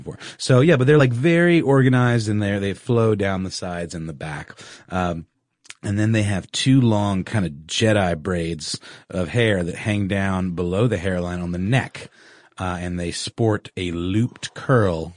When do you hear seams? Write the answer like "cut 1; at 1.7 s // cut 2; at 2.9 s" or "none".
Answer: none